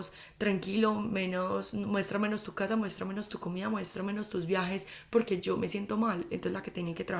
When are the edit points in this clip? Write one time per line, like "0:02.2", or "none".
none